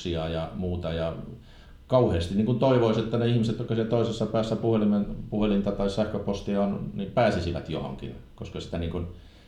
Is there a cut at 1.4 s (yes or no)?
no